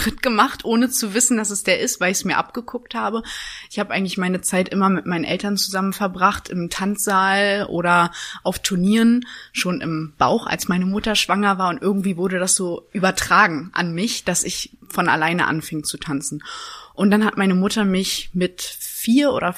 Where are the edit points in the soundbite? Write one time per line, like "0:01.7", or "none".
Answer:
none

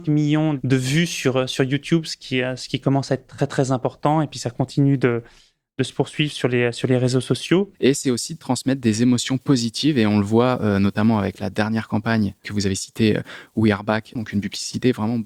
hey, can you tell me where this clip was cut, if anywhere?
0:07.7
0:14.2

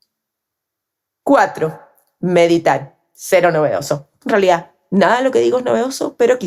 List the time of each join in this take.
0:01.2

